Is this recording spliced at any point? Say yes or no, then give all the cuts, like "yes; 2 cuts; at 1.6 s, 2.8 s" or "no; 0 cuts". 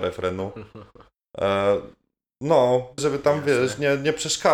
yes; 1 cut; at 3.0 s